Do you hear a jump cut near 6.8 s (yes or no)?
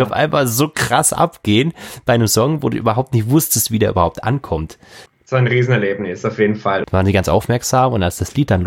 yes